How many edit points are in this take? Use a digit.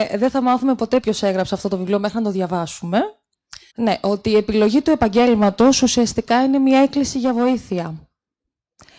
1